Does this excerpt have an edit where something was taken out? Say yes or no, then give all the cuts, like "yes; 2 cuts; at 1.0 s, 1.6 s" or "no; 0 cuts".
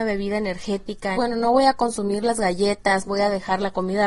yes; 2 cuts; at 1.1 s, 3.0 s